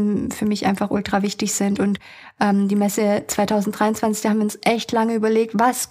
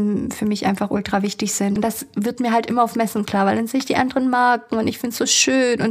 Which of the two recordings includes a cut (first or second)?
second